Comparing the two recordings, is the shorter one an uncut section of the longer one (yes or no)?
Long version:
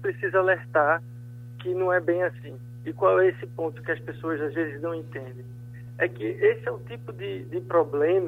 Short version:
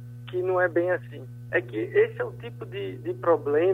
no